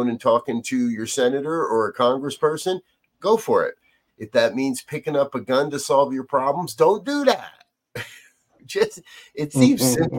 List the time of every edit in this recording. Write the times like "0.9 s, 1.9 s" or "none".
4.1 s